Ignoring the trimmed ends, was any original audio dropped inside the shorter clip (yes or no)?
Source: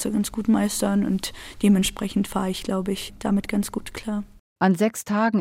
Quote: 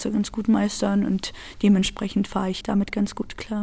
yes